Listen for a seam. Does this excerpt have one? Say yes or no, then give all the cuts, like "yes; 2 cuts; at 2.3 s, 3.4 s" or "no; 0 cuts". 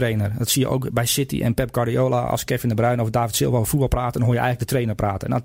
no; 0 cuts